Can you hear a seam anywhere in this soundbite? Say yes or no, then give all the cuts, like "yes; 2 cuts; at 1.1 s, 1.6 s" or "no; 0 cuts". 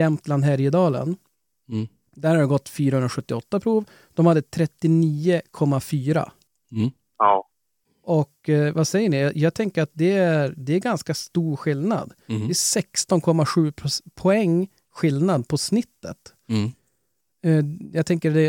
no; 0 cuts